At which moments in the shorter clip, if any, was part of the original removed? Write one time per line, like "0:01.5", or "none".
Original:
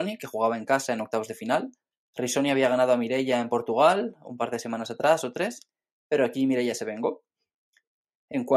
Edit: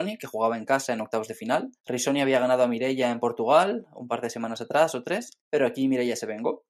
0:01.8
0:05.4